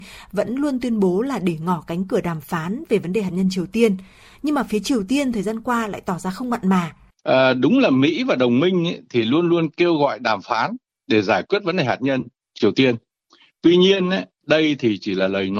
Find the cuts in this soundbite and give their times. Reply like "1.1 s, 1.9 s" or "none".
7.1 s